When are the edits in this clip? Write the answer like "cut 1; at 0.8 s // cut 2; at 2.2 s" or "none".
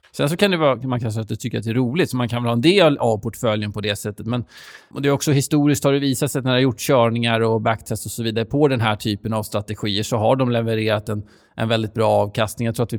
cut 1; at 4.9 s